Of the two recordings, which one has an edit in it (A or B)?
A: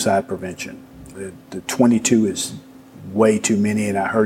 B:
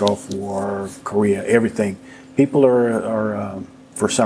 A